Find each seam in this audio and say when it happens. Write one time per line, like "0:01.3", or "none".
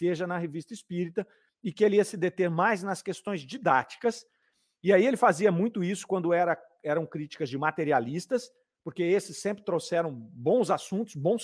none